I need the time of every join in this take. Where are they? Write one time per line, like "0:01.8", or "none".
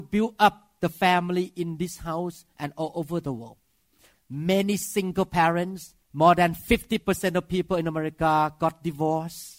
0:04.1
0:06.0